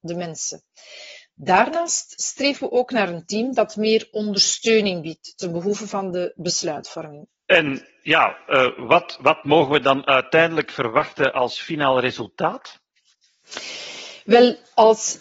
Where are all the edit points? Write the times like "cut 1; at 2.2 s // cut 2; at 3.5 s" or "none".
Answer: cut 1; at 7.3 s